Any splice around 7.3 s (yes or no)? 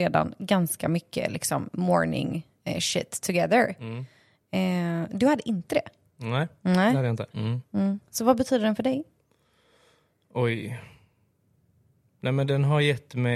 yes